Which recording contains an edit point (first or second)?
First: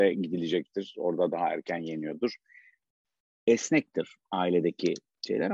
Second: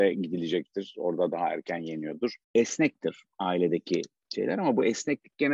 second